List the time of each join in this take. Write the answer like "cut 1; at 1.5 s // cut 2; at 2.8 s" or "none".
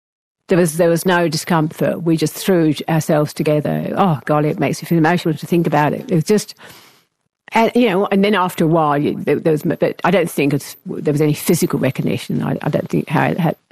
none